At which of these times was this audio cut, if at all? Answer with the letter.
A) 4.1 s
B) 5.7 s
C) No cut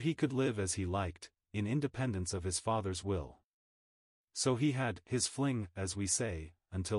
C